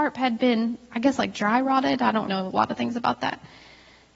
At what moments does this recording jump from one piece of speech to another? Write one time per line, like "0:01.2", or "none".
0:02.3